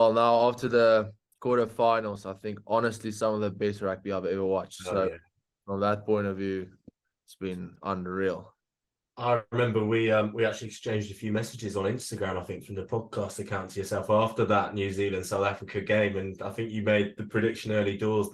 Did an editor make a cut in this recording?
no; 0 cuts

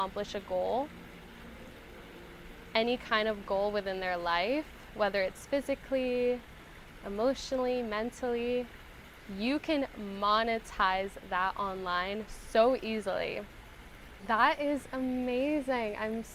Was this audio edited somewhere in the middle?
yes; 1 cut; at 14.2 s

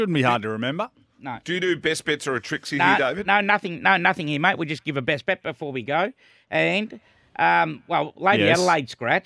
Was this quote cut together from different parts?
no; 0 cuts

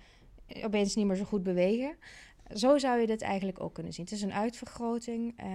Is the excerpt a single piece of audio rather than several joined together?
yes; 0 cuts

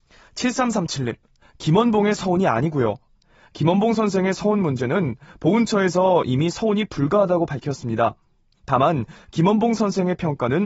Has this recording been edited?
yes; 1 cut; at 1.4 s

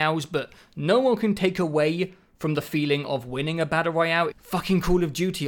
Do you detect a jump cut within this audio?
yes; 1 cut; at 4.3 s

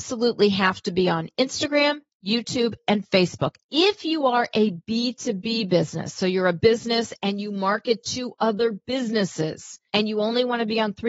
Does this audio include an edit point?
yes; 1 cut; at 3.6 s

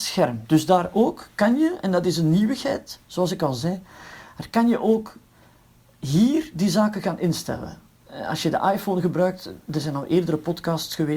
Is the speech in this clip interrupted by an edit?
no; 0 cuts

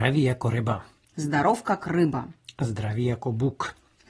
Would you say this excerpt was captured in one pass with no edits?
yes; 0 cuts

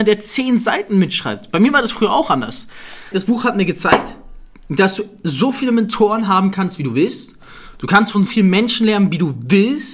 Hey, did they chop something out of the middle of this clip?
yes; 2 cuts; at 3.1 s, 8.3 s

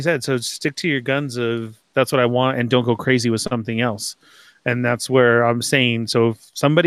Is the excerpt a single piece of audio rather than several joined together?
yes; 0 cuts

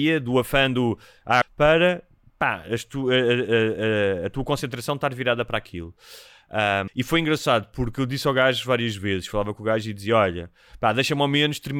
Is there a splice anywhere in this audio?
yes; 2 cuts; at 1.4 s, 6.9 s

